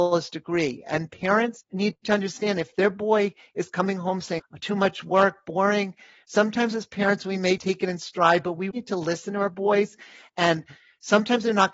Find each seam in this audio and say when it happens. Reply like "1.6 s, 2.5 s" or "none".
4.4 s, 7.6 s, 8.7 s